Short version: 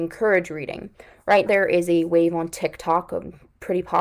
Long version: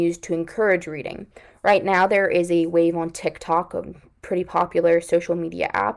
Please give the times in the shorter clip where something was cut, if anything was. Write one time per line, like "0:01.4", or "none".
0:01.5